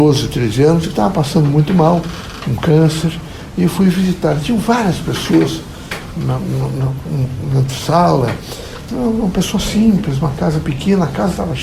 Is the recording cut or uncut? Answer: uncut